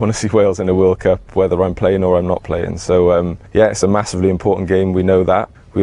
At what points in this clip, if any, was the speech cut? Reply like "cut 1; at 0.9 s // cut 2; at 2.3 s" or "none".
none